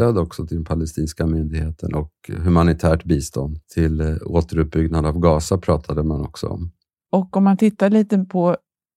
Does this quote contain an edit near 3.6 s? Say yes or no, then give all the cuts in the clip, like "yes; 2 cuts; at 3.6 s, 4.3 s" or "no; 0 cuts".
yes; 1 cut; at 3.6 s